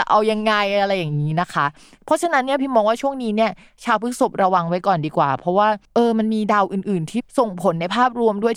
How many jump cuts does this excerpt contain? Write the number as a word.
one